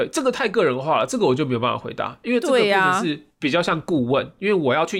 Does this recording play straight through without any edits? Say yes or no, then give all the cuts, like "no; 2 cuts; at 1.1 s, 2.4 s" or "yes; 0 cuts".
yes; 0 cuts